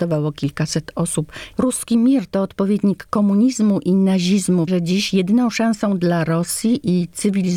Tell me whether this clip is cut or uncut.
cut